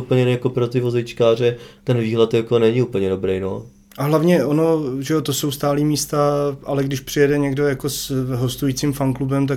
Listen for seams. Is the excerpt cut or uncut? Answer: uncut